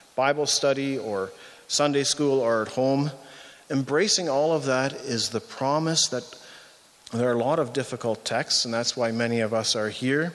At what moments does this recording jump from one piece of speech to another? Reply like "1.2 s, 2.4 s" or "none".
7.0 s